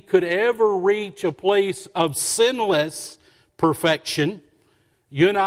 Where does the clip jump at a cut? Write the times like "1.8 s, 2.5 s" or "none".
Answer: none